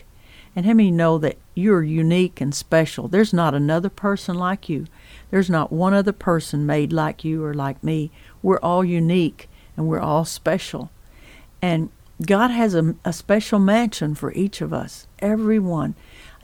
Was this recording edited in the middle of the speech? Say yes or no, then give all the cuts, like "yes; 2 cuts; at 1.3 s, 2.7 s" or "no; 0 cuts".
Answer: no; 0 cuts